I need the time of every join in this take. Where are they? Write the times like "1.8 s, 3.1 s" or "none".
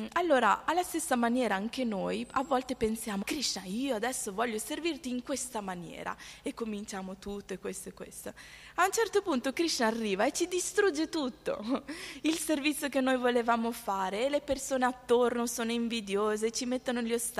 3.2 s